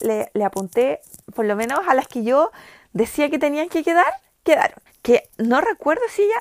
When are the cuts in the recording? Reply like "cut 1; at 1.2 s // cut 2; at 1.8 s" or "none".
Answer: cut 1; at 1.2 s // cut 2; at 4.9 s

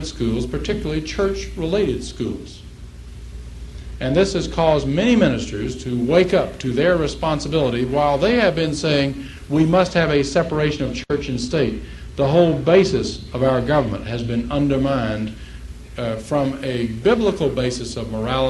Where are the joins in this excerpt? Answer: none

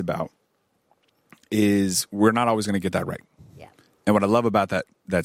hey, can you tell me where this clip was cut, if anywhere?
none

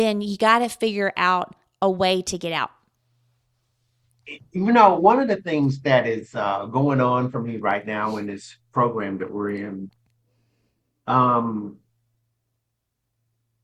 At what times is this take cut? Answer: none

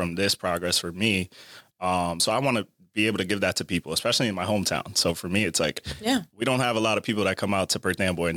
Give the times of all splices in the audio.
none

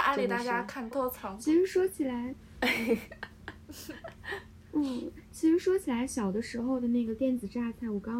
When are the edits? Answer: cut 1; at 0.9 s

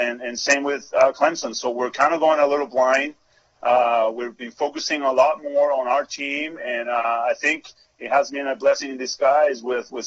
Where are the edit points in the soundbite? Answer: none

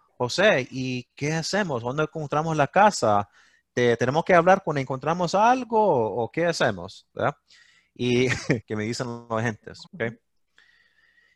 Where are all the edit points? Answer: cut 1; at 8.6 s // cut 2; at 9.9 s

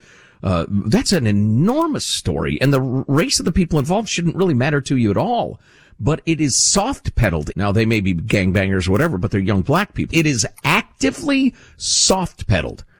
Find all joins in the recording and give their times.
cut 1; at 7.5 s // cut 2; at 10.1 s

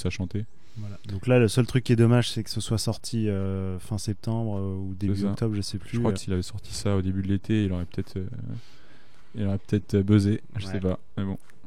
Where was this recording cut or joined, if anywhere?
cut 1; at 6.2 s

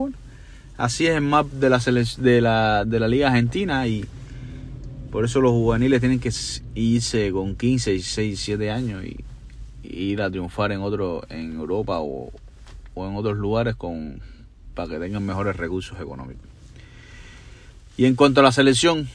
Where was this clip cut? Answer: none

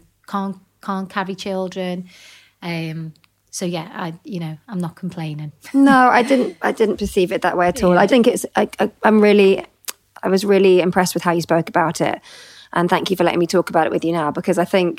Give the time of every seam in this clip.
cut 1; at 8.1 s

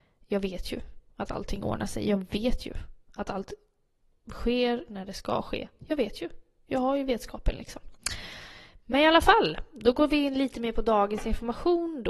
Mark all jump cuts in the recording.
cut 1; at 6.7 s

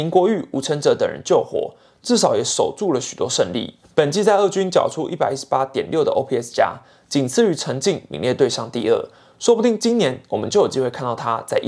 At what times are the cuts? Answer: cut 1; at 3.8 s

